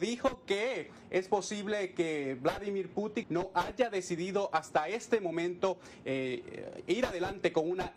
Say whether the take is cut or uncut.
cut